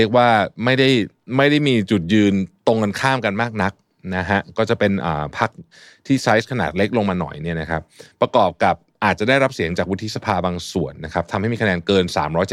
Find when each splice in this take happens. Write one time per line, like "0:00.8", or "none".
none